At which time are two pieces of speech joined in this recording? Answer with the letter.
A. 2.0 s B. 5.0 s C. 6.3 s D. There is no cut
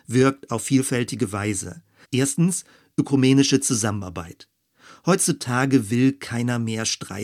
A